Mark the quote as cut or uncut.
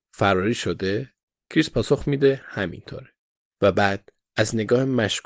cut